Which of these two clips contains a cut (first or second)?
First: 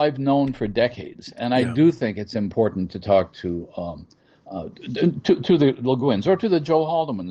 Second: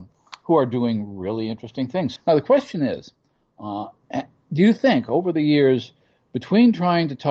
second